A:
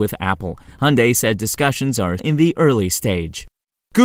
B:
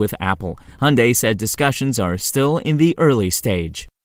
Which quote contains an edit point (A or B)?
A